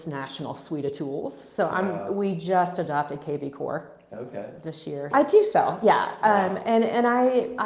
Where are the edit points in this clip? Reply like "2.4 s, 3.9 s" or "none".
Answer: 5.1 s